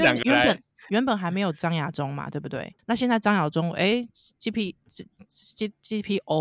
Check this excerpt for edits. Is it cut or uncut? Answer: cut